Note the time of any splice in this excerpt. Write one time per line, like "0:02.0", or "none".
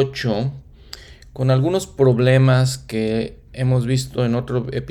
none